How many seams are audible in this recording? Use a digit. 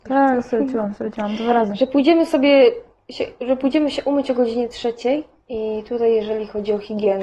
1